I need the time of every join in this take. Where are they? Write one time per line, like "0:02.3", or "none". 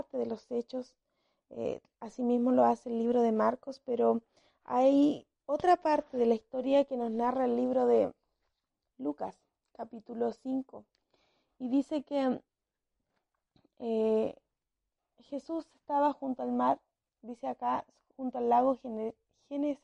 none